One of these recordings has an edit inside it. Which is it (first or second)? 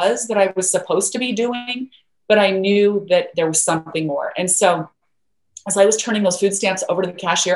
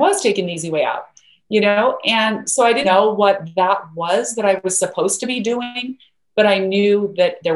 second